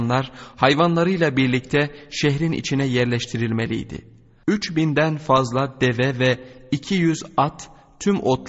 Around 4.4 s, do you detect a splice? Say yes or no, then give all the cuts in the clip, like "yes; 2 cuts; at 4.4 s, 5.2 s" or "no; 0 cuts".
yes; 1 cut; at 4.4 s